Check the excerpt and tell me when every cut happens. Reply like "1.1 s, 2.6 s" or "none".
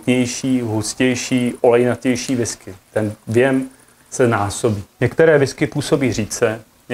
5.0 s